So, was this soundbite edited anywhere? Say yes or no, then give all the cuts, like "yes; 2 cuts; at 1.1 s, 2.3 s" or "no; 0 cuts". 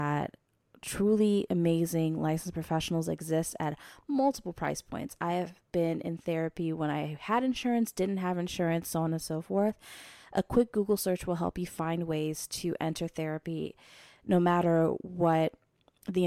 no; 0 cuts